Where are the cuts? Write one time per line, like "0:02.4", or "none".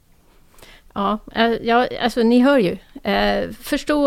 none

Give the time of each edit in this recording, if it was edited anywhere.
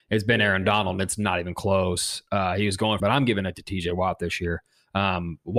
0:03.0

